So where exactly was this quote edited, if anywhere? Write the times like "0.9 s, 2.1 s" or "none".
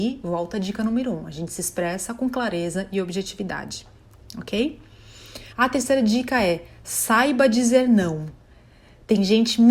5.5 s

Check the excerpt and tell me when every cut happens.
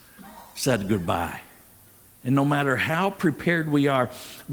none

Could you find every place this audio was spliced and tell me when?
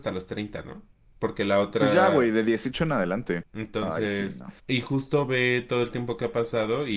3.4 s, 4.6 s

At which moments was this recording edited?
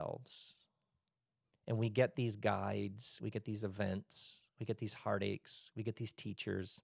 none

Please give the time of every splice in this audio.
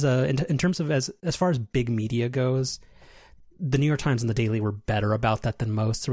none

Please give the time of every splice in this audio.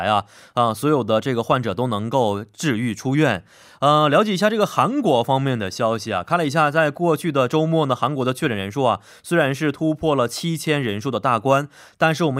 none

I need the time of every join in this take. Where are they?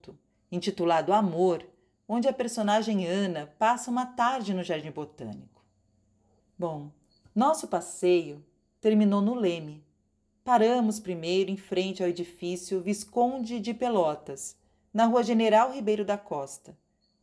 6.4 s

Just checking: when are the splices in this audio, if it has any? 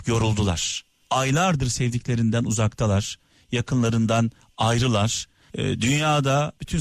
1.0 s, 5.5 s

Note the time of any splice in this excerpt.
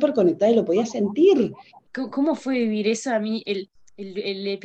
1.9 s

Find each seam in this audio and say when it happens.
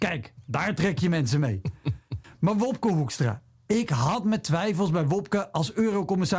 none

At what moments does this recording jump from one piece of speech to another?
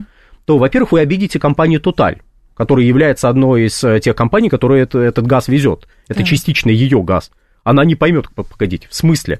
none

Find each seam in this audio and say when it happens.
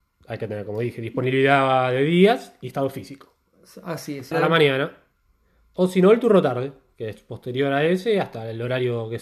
4.3 s

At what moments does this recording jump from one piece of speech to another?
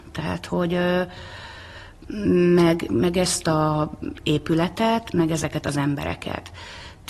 2.9 s

